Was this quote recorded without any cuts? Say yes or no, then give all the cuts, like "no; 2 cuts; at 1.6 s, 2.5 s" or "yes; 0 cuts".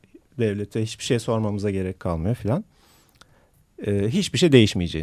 yes; 0 cuts